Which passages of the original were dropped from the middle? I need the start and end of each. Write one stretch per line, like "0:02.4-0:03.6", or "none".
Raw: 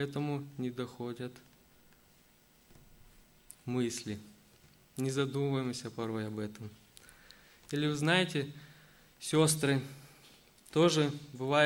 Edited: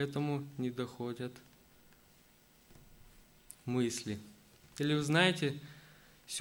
0:04.7-0:07.6